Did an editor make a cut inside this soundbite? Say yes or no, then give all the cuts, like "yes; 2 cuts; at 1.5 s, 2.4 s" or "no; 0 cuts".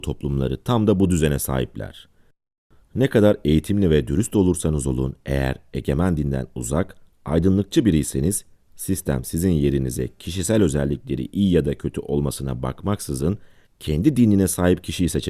no; 0 cuts